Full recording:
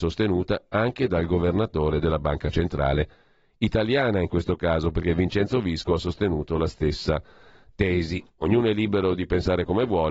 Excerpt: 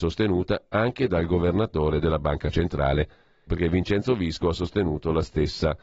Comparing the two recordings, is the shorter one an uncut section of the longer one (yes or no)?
no